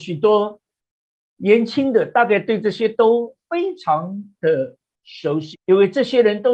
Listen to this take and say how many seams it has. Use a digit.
1